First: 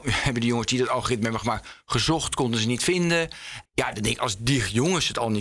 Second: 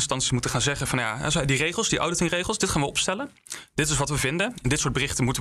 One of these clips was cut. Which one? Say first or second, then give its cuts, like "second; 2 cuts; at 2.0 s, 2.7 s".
first; 1 cut; at 3.7 s